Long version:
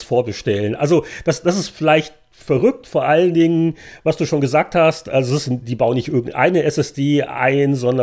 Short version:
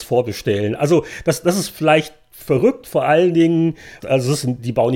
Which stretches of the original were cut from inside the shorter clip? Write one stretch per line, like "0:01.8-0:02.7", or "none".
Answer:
0:04.0-0:05.0